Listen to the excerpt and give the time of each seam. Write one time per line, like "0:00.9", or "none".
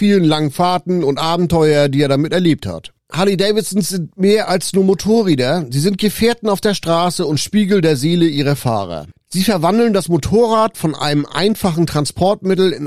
0:09.2